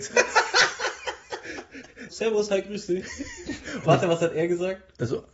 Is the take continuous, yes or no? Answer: no